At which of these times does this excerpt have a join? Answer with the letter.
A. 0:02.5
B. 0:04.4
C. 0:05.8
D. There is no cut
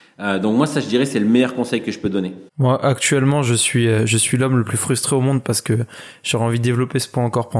A